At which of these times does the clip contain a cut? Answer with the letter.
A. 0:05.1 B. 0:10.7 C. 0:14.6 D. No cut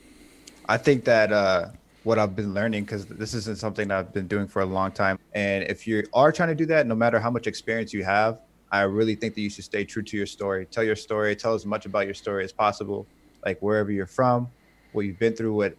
A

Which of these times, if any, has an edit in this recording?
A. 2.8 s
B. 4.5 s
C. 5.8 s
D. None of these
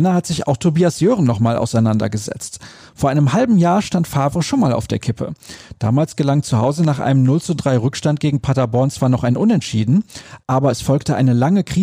D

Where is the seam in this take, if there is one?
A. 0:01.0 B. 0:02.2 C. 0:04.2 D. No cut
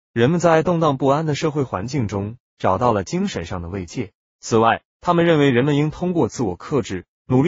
C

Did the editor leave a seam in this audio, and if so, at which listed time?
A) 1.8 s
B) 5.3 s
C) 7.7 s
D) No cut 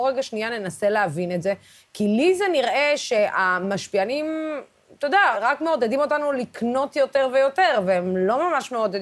B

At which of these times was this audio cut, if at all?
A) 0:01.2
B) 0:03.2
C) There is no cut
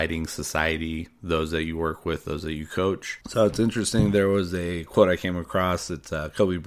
B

